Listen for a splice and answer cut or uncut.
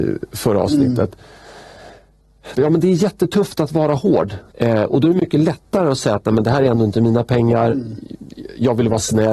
cut